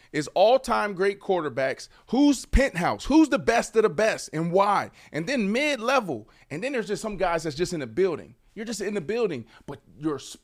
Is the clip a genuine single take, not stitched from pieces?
yes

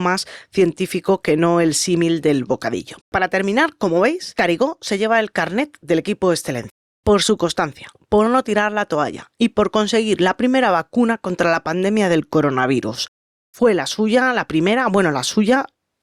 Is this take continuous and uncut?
no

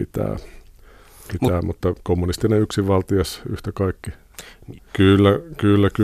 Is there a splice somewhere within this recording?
yes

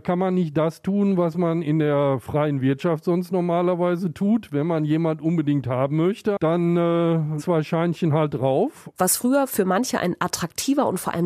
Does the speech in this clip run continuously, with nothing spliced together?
no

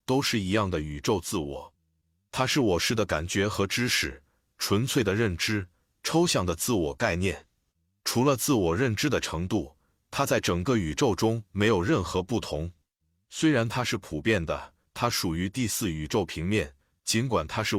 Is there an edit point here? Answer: yes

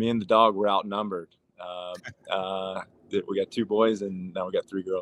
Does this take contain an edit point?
yes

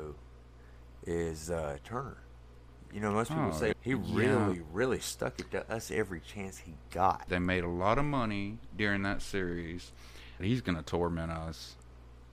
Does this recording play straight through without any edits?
no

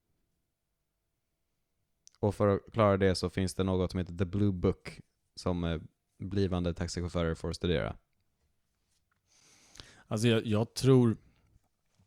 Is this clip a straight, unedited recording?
yes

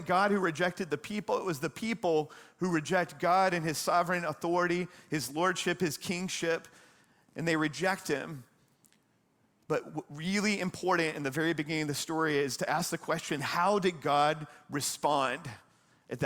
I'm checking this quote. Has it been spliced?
no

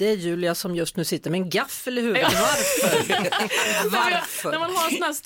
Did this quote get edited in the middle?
no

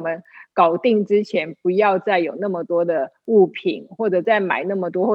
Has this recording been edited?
no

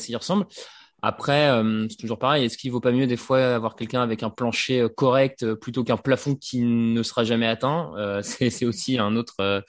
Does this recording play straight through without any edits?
yes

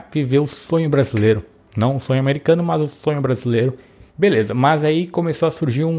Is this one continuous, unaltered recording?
no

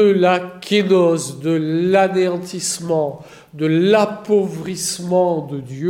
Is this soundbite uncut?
yes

